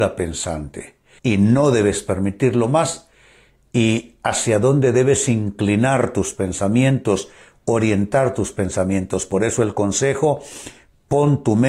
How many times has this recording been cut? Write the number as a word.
one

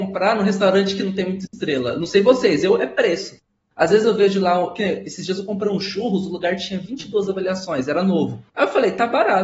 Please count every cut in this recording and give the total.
one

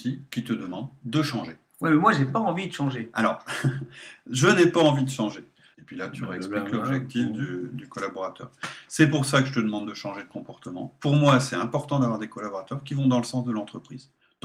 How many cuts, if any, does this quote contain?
one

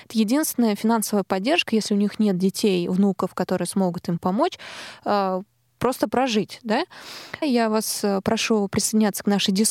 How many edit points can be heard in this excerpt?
one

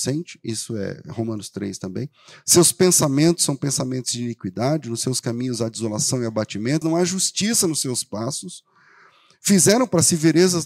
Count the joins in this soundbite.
one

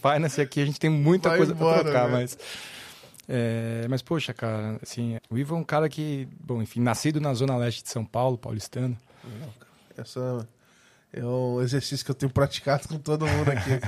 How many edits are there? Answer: two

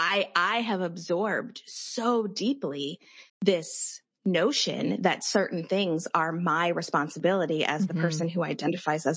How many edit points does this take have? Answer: one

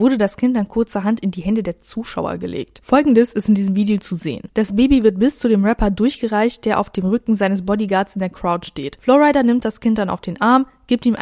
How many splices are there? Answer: zero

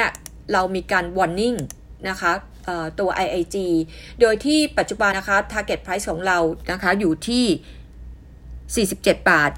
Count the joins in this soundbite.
one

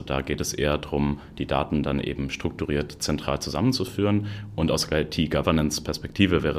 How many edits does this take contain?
zero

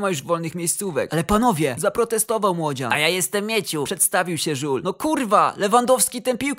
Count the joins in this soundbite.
one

